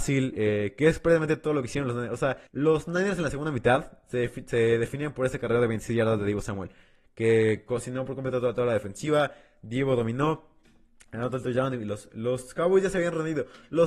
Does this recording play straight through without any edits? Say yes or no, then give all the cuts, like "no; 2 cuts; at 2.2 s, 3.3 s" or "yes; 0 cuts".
no; 1 cut; at 2.5 s